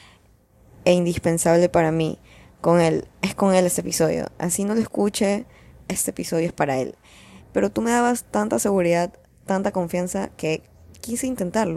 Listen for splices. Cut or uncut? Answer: cut